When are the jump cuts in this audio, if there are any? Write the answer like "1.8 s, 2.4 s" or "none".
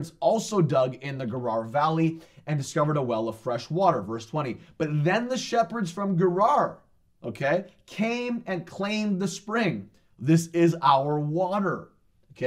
none